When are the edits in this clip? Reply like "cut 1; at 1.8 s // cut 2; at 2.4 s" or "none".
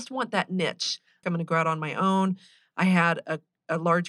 cut 1; at 1.2 s